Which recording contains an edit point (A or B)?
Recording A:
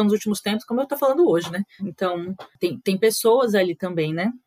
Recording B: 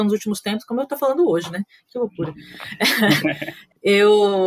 A